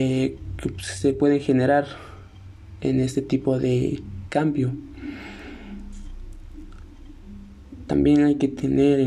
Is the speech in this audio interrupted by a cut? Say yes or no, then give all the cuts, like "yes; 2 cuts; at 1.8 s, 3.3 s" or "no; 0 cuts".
no; 0 cuts